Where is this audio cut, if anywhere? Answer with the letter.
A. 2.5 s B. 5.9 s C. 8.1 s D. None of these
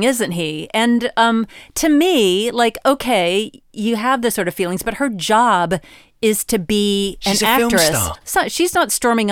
C